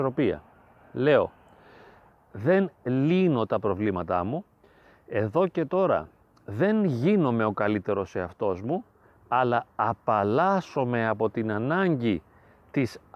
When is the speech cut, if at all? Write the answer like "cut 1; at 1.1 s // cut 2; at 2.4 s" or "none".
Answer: cut 1; at 2.1 s